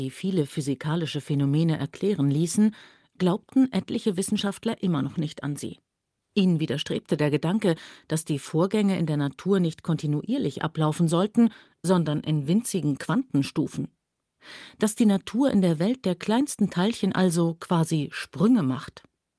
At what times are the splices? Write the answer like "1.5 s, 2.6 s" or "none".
none